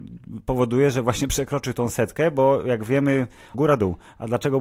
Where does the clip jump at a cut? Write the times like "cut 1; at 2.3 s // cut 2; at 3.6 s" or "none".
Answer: cut 1; at 3.5 s